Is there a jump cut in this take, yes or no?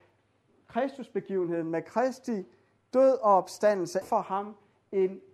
yes